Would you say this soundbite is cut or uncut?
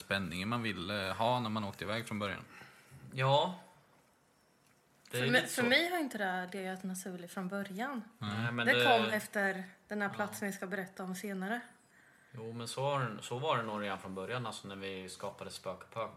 uncut